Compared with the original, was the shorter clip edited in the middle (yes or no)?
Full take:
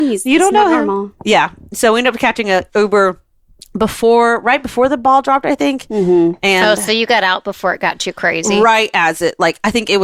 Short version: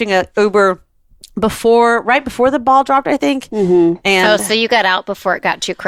no